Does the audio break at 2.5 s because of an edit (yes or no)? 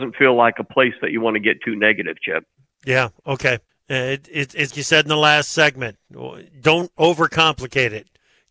no